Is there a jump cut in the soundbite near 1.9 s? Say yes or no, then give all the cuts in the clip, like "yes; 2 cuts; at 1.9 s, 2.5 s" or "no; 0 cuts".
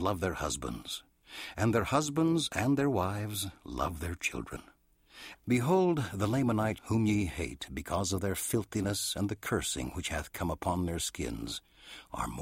no; 2 cuts; at 5.3 s, 6.8 s